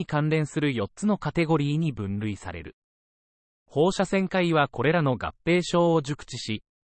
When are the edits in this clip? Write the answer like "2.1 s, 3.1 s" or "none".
none